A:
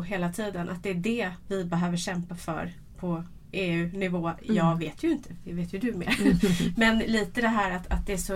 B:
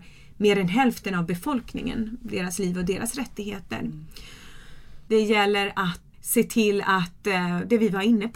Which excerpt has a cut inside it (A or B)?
B